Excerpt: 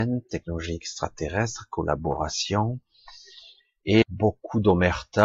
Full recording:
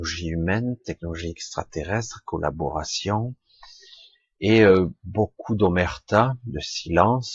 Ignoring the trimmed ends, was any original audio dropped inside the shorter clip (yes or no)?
yes